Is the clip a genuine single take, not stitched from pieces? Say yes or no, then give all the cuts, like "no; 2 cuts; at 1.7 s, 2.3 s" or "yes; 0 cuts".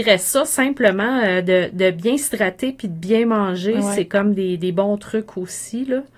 yes; 0 cuts